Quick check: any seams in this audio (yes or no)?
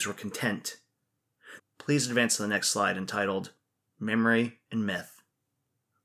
yes